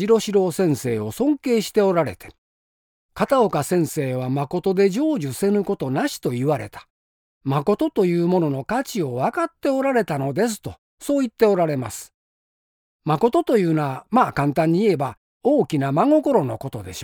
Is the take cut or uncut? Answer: uncut